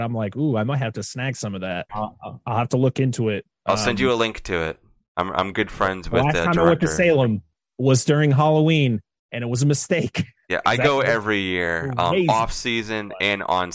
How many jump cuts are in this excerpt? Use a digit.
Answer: 1